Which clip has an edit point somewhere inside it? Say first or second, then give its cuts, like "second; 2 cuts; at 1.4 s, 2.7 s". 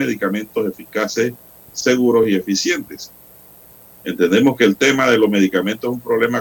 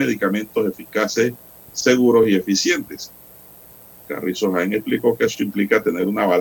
first; 1 cut; at 4.0 s